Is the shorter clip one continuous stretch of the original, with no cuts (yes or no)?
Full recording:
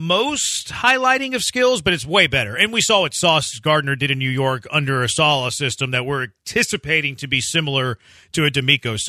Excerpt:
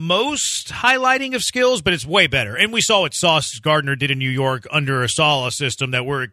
yes